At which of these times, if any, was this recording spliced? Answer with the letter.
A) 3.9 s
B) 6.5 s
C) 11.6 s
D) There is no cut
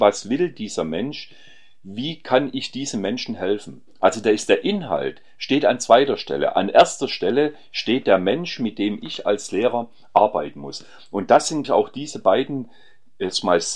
C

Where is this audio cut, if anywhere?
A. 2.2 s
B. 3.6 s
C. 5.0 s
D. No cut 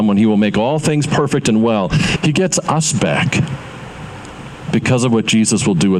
A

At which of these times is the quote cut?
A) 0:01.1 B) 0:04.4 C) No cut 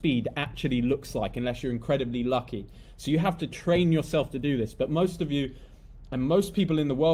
C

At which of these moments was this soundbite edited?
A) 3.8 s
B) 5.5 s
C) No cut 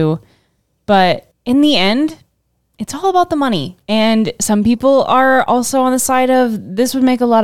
A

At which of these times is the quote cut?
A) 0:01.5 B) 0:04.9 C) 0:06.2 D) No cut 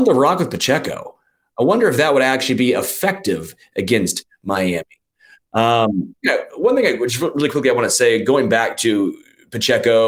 C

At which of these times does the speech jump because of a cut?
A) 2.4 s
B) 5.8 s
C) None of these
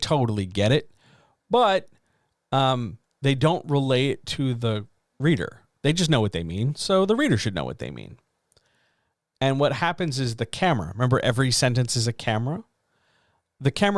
C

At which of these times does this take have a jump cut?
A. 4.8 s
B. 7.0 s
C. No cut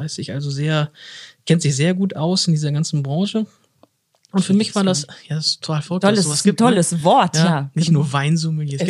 C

